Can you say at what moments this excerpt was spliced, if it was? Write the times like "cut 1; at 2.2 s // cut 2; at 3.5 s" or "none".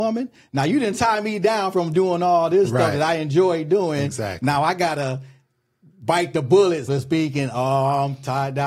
cut 1; at 6.9 s